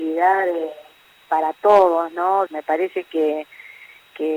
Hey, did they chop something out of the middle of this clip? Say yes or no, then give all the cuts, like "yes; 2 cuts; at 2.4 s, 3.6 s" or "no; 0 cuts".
yes; 1 cut; at 2.5 s